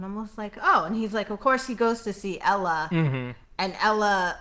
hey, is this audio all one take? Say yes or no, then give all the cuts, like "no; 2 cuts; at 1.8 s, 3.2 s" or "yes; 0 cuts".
yes; 0 cuts